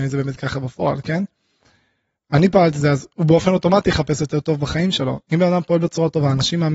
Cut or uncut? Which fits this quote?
uncut